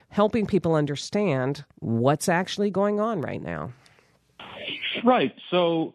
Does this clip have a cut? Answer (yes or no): yes